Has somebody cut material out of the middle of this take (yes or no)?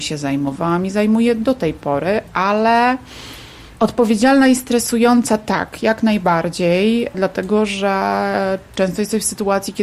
yes